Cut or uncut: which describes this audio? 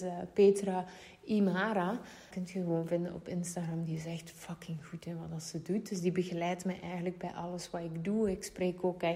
cut